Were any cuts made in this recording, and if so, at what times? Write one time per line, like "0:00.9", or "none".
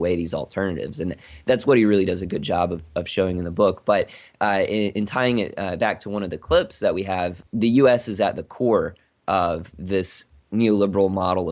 none